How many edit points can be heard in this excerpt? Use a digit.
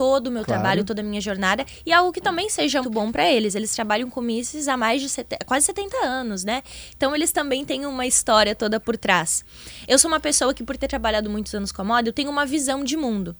1